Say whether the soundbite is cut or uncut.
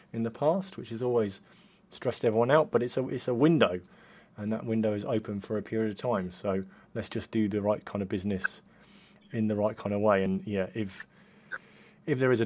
uncut